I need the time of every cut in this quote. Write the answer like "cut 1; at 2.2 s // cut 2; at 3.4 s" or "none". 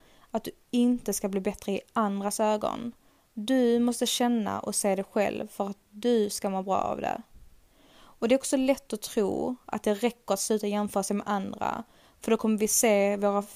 none

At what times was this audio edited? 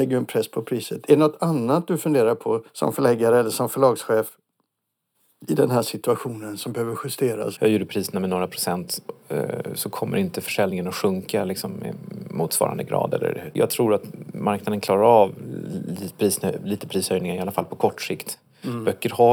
cut 1; at 7.6 s

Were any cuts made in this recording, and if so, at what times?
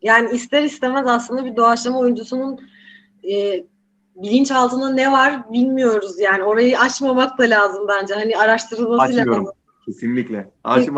none

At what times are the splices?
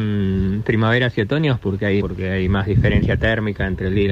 cut 1; at 2.0 s

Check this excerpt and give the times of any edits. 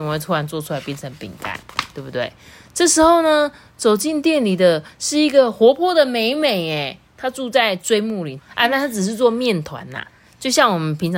cut 1; at 8.4 s

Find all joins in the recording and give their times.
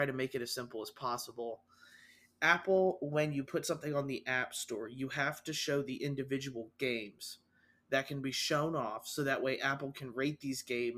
none

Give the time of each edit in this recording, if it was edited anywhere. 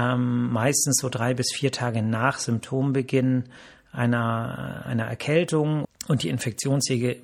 cut 1; at 5.8 s

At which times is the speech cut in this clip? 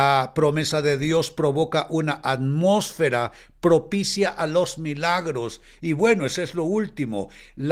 cut 1; at 5.8 s

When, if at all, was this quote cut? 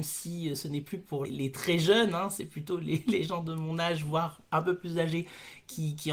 cut 1; at 1.2 s

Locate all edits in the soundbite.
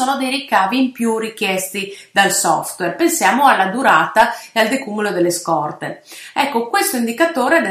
none

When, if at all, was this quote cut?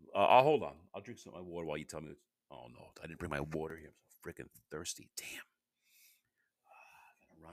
none

